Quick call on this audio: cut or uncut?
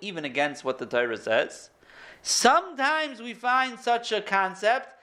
uncut